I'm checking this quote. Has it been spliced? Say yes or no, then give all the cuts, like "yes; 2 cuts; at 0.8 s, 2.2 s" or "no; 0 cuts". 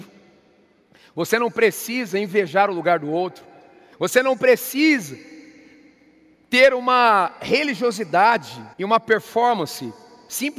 yes; 2 cuts; at 3.9 s, 8.7 s